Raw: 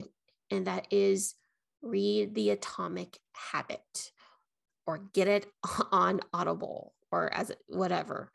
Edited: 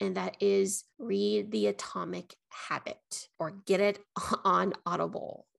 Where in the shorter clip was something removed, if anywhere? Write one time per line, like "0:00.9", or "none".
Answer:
0:00.9
0:03.3